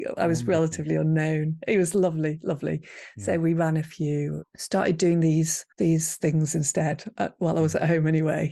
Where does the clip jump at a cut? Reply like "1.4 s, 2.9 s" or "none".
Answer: 4.4 s, 5.7 s